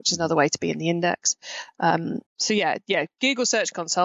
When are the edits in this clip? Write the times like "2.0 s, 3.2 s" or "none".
2.3 s